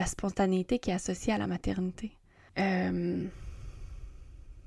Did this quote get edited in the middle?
yes; 1 cut; at 2.5 s

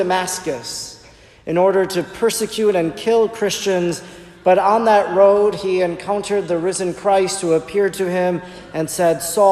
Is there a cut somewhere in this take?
no; 0 cuts

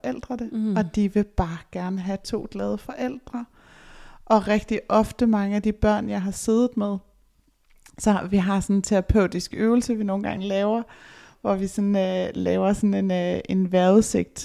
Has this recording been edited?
no; 0 cuts

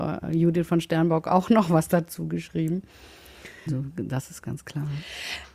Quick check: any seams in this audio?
yes; 1 cut; at 3.7 s

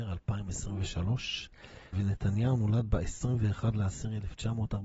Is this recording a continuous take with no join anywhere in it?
no; 1 cut; at 1.9 s

